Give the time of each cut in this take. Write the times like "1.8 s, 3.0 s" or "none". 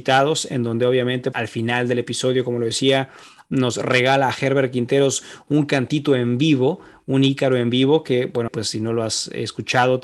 1.3 s, 8.5 s

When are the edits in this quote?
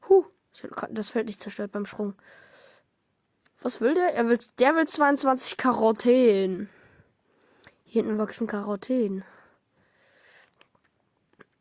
none

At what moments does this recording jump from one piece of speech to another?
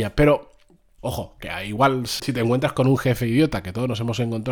1.0 s, 2.2 s

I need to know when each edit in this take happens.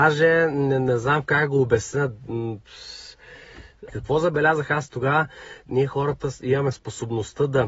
3.9 s, 5.7 s

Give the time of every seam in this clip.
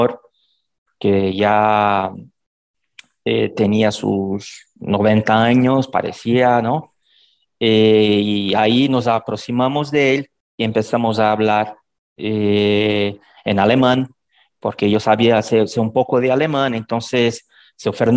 none

